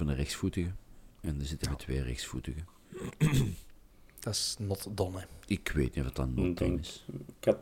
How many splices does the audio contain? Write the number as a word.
zero